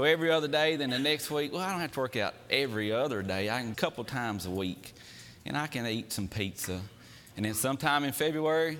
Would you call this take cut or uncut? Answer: cut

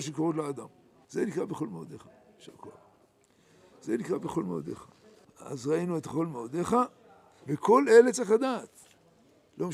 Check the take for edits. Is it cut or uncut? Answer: cut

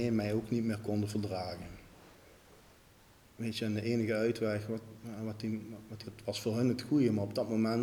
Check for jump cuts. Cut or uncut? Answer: cut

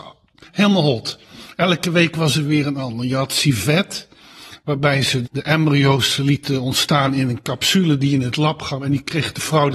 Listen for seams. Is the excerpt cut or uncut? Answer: cut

